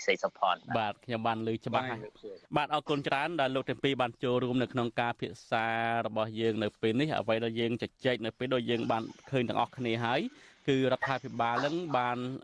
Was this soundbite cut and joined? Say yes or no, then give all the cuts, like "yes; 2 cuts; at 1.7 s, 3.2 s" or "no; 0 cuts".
yes; 1 cut; at 2.4 s